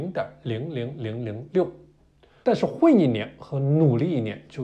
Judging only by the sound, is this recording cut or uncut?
cut